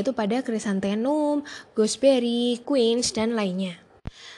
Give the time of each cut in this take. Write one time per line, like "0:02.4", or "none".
0:02.6